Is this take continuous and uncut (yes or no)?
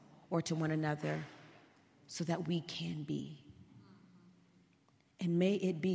yes